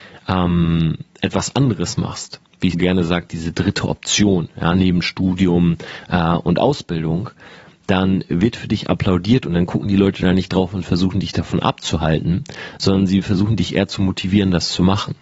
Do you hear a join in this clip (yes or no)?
yes